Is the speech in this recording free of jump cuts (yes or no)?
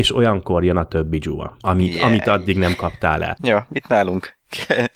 no